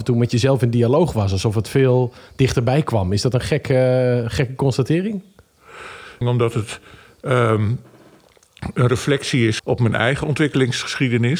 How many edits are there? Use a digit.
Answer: 2